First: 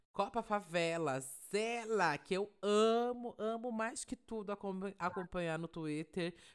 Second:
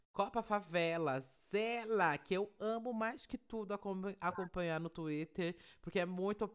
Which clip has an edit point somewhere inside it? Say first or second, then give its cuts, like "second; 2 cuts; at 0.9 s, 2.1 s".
second; 1 cut; at 2.6 s